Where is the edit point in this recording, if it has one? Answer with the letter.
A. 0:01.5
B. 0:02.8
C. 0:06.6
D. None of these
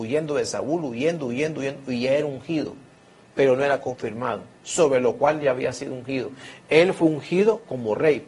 D